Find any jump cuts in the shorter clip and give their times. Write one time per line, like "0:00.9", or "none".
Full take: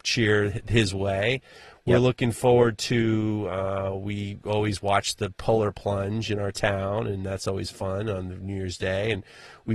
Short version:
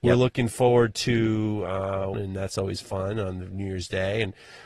0:02.1